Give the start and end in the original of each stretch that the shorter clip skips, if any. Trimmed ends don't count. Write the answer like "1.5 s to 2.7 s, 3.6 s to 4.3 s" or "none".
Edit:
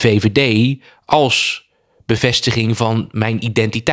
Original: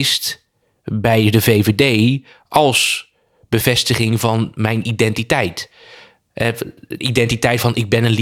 none

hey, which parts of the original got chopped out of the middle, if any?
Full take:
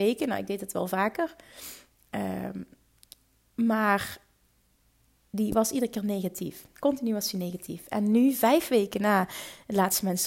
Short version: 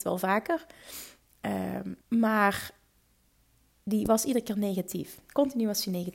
2.7 s to 3.5 s

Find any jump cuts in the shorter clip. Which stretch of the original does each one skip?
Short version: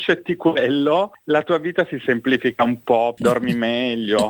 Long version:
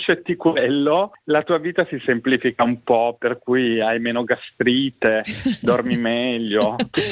3.2 s to 5.6 s

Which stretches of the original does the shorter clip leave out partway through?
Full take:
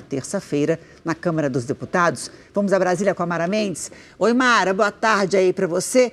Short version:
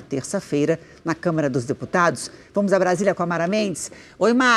none

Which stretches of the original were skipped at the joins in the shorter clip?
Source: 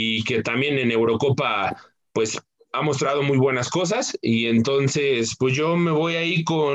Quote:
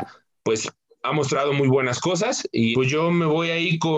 4.4 s to 5.4 s

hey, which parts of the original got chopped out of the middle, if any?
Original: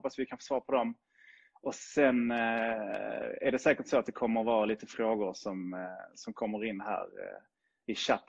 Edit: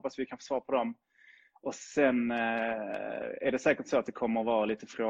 none

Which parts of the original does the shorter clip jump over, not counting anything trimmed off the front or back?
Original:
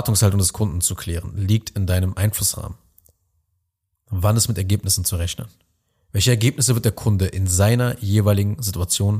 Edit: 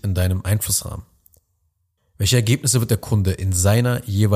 3.7 s to 5.9 s

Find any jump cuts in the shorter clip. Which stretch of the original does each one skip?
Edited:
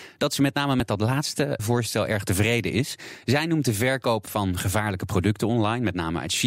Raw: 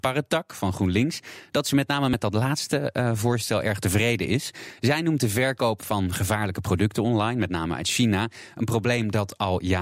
2.9 s to 3.1 s

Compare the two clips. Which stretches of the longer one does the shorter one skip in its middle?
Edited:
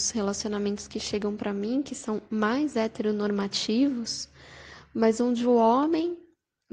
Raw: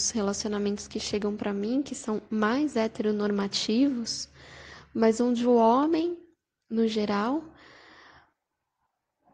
none

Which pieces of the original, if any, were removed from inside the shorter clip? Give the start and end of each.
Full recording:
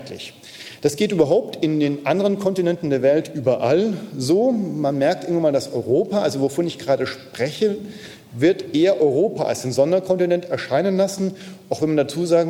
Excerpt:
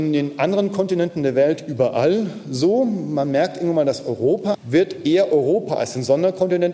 6.2 s to 8.2 s

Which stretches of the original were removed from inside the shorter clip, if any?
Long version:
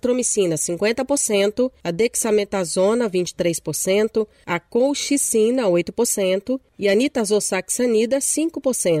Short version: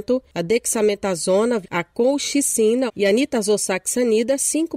3.1 s to 4.4 s, 5.6 s to 6.7 s

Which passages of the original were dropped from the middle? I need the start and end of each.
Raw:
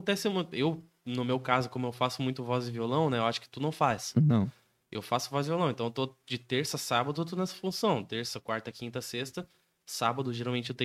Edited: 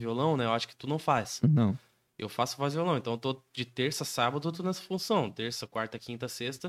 none

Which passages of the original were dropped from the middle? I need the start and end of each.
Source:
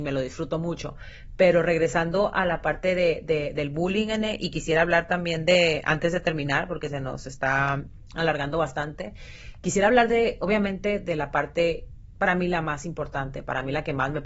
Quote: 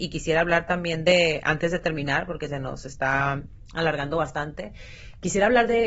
none

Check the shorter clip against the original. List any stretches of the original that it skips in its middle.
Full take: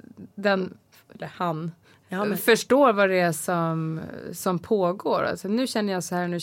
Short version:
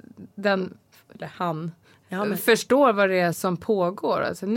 3.3 s to 4.3 s

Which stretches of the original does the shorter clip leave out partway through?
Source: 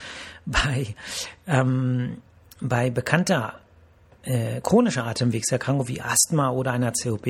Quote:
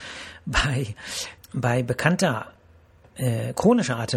1.4 s to 2.5 s

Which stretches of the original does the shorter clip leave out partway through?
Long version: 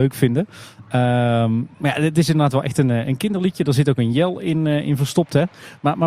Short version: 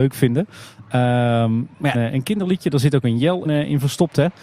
1.9 s to 2.9 s, 4.4 s to 4.6 s

